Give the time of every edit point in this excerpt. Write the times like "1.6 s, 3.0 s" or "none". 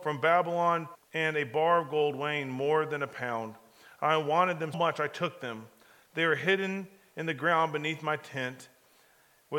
0.9 s, 4.7 s